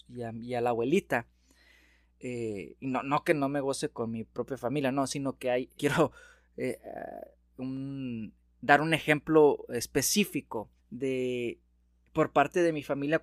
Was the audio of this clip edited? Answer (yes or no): yes